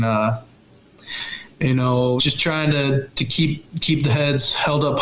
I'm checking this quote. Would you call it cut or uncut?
cut